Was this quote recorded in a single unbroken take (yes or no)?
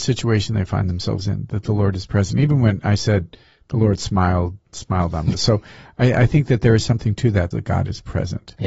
no